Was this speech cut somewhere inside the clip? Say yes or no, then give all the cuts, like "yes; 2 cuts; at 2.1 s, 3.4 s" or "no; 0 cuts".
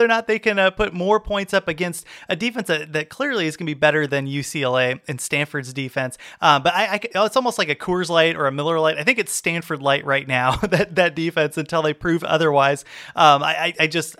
no; 0 cuts